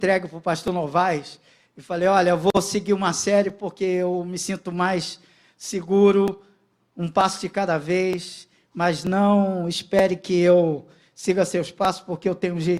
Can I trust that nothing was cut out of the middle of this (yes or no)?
yes